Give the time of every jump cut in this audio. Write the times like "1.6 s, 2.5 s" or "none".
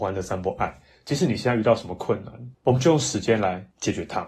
none